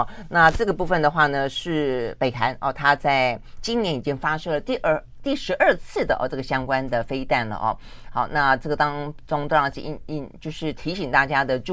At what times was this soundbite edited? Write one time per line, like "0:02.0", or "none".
none